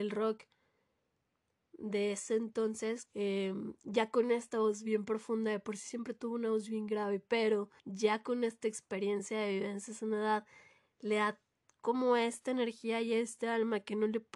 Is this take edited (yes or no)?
yes